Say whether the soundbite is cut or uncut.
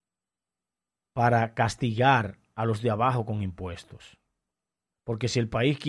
cut